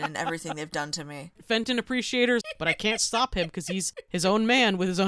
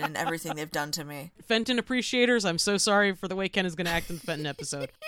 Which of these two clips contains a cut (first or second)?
first